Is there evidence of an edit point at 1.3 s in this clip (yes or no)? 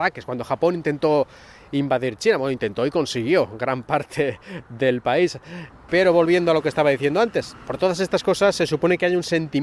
no